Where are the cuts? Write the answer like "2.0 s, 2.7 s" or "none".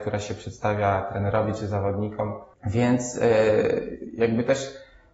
2.5 s